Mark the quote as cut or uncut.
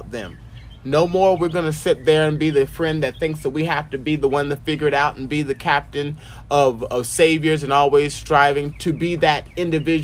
cut